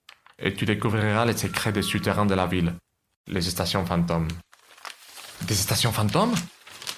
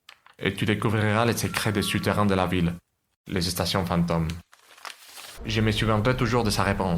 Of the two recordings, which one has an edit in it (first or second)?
second